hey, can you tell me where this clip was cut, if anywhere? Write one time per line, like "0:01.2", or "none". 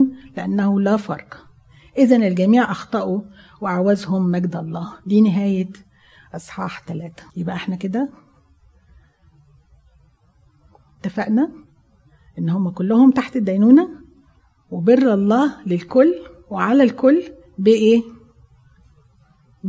0:07.3